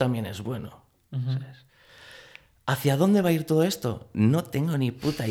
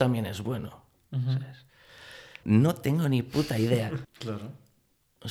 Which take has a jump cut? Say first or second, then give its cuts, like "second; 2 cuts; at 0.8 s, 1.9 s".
second; 2 cuts; at 2.4 s, 4.0 s